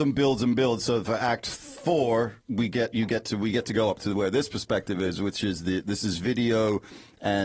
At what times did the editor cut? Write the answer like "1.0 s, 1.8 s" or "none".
2.4 s